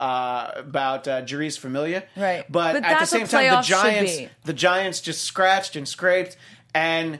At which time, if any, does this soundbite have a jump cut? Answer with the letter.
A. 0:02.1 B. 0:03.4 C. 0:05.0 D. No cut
A